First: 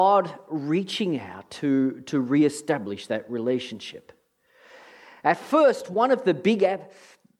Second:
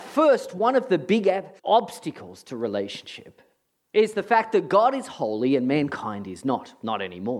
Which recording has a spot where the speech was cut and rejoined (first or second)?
second